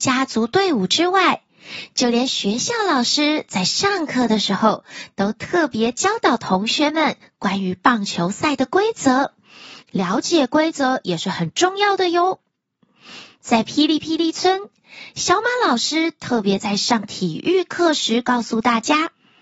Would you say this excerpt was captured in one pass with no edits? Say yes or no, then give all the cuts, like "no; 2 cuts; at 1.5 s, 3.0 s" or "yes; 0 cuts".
no; 1 cut; at 9.8 s